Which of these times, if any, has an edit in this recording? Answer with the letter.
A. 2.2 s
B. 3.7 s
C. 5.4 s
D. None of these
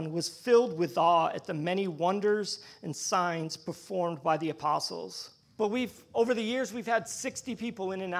C